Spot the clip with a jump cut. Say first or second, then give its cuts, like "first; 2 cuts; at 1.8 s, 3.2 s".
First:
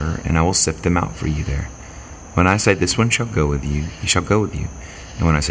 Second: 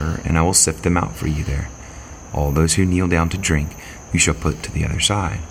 second; 2 cuts; at 2.3 s, 4.1 s